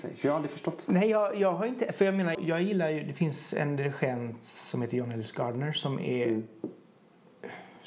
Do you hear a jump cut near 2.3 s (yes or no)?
yes